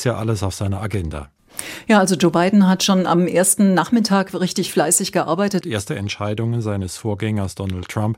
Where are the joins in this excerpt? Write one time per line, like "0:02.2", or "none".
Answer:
0:05.6